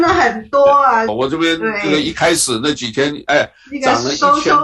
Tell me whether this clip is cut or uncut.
cut